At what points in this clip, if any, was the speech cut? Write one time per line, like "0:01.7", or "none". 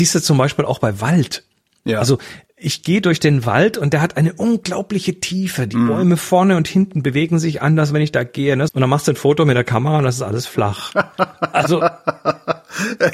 0:08.7

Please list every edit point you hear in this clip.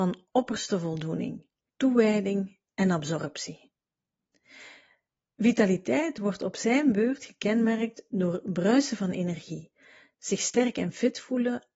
0:01.7

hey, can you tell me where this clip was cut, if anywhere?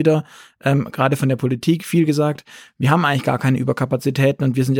none

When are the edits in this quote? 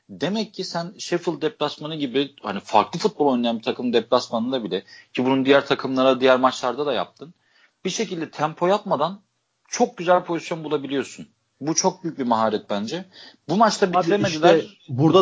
none

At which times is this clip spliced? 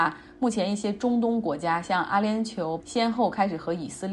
0:02.8

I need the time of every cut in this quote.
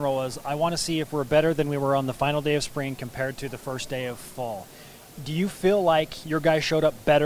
none

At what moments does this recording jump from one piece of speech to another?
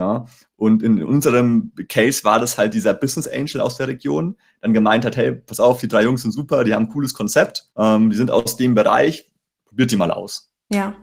0:07.7
0:09.6

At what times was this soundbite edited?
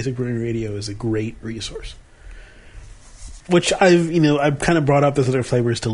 0:03.4

